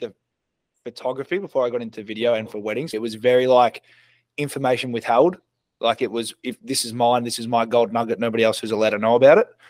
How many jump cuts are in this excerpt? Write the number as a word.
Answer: one